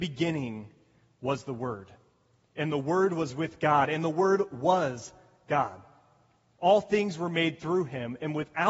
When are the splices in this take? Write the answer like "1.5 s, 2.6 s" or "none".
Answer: 6.6 s